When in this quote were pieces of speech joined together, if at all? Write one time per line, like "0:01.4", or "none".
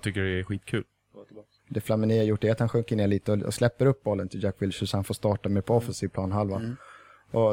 0:01.6